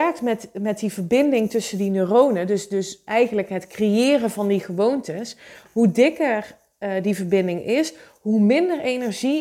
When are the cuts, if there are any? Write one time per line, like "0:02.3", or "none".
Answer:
none